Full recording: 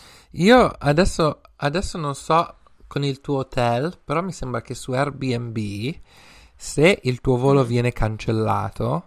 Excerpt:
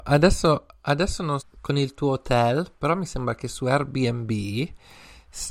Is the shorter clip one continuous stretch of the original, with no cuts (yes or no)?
no